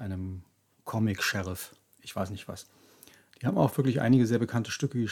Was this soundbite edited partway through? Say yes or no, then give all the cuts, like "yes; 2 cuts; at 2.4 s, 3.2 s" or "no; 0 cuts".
no; 0 cuts